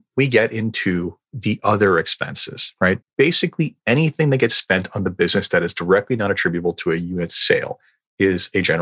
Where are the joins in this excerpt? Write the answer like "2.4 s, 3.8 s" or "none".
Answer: 3.0 s